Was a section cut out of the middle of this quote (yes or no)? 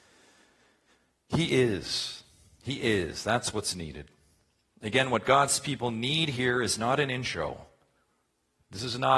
no